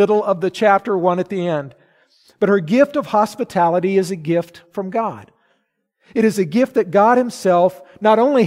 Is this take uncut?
yes; 0 cuts

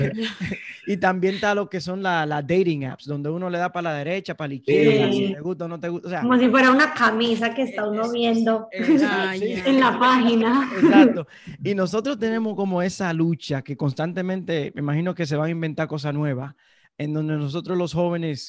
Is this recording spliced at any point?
no; 0 cuts

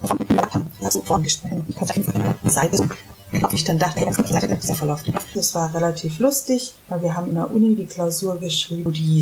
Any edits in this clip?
yes; 1 cut; at 5.4 s

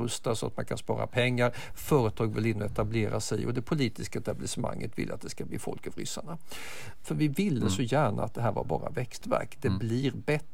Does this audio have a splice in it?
yes; 1 cut; at 7.0 s

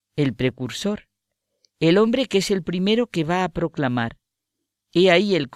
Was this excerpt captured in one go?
yes; 0 cuts

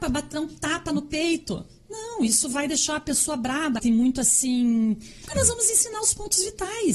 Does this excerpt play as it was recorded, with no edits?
no; 2 cuts; at 3.8 s, 5.2 s

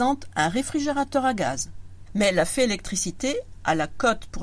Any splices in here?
no; 0 cuts

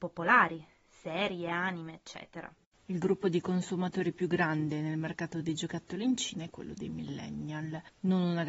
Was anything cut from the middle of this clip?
yes; 1 cut; at 2.6 s

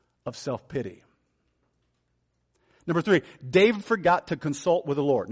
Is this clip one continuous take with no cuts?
yes; 0 cuts

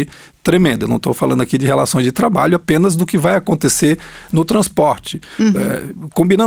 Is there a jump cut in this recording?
no; 0 cuts

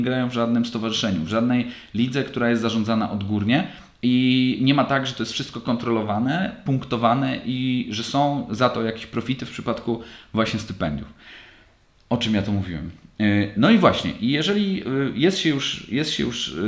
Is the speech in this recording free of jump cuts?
yes; 0 cuts

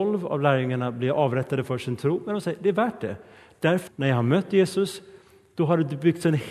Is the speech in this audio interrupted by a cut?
yes; 1 cut; at 3.9 s

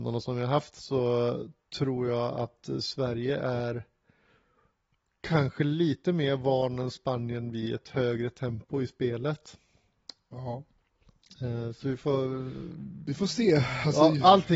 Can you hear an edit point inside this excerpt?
no; 0 cuts

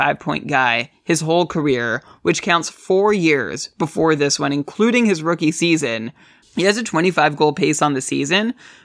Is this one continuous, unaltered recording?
no; 1 cut; at 6.4 s

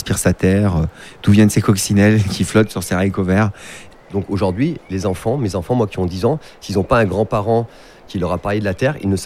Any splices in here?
yes; 1 cut; at 3.9 s

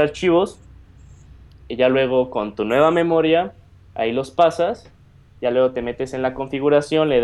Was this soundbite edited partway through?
no; 0 cuts

